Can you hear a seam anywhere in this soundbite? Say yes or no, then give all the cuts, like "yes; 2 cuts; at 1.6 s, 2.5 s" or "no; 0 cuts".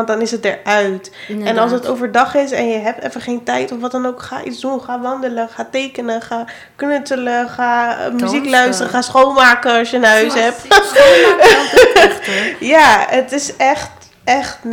no; 0 cuts